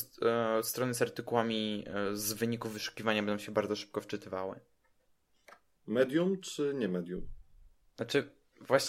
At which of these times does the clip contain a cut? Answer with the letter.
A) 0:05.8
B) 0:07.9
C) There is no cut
A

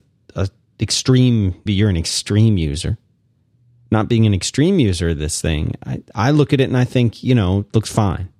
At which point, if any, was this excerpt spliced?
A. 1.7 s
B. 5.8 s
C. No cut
A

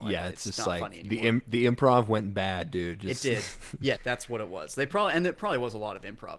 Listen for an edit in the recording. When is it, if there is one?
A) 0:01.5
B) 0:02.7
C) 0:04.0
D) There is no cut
C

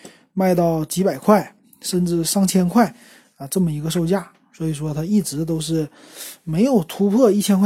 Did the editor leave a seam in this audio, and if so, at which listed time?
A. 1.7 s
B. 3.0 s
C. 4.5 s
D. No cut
D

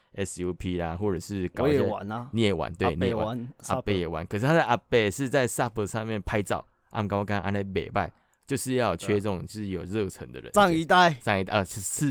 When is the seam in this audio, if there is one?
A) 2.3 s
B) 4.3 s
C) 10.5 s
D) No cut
C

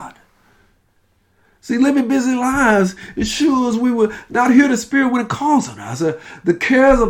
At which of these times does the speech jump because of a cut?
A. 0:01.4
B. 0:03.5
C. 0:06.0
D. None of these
D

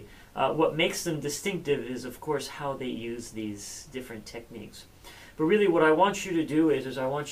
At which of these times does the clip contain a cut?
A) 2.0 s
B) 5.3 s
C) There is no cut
C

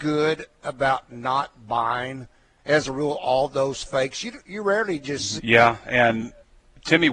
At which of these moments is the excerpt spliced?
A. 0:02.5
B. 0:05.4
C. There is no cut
B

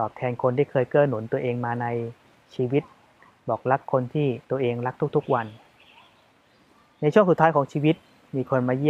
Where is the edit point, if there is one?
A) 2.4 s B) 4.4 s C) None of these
B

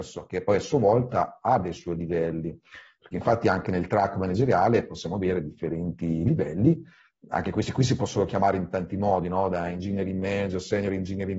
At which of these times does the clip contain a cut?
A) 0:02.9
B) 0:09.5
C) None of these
C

